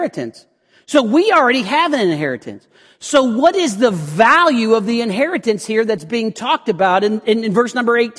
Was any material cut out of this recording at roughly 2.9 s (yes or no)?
no